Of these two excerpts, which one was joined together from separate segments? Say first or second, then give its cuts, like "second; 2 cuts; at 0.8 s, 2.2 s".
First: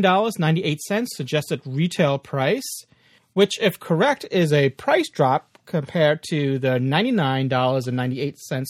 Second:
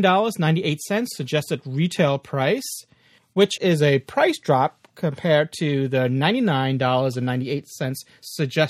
second; 1 cut; at 3.6 s